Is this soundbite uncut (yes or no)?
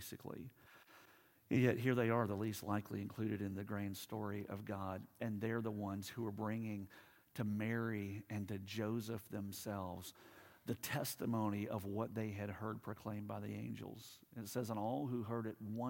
yes